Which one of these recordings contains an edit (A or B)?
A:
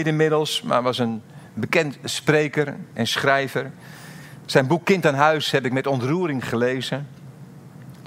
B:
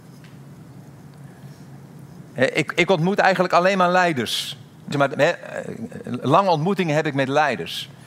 B